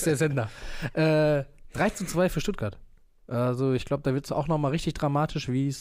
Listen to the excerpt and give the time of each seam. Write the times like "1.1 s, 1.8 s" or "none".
none

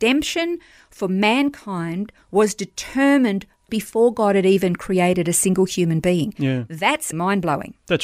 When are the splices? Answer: 7.1 s

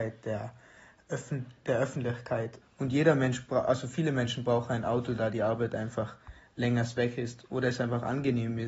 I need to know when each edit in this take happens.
2.6 s

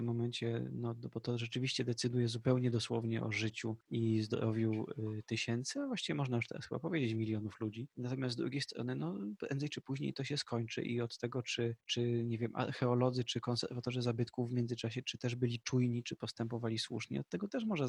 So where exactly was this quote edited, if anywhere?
15.0 s

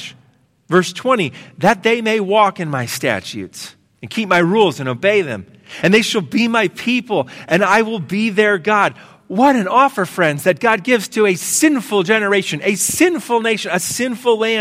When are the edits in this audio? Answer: none

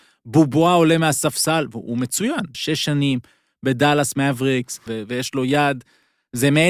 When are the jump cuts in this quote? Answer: 2.5 s, 4.9 s

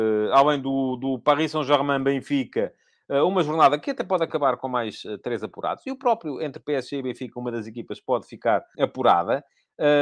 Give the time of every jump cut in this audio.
8.7 s

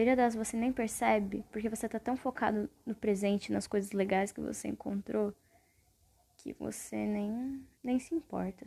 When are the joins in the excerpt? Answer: 7.8 s

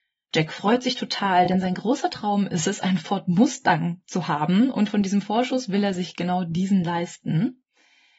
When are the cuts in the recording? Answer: none

